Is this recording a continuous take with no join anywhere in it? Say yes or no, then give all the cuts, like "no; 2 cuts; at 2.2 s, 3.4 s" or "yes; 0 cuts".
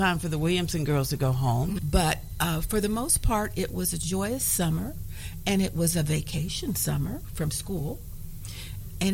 no; 1 cut; at 1.8 s